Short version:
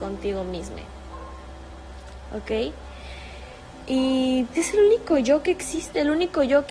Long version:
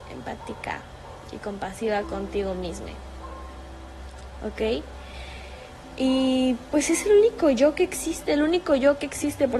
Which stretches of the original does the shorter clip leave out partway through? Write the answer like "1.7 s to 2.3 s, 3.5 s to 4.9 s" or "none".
6.6 s to 6.9 s